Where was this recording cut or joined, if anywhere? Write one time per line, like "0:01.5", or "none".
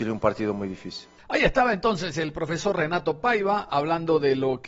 0:01.2